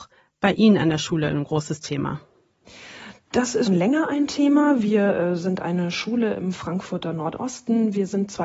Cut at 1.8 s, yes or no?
no